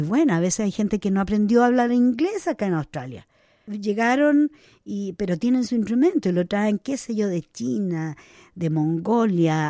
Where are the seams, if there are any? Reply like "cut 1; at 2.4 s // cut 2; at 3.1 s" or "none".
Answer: none